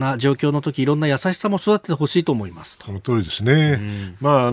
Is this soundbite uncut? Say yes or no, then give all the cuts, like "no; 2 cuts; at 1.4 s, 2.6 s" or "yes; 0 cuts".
yes; 0 cuts